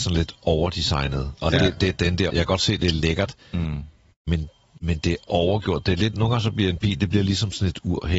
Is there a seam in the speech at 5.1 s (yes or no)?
no